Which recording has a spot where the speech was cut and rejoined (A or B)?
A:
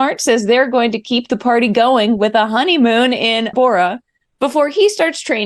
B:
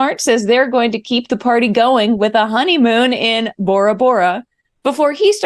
A